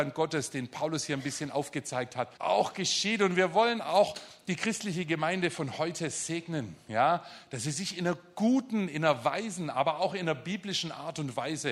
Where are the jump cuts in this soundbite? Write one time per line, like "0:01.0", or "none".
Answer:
0:02.4